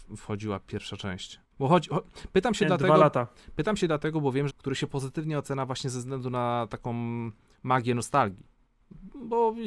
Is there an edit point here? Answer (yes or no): yes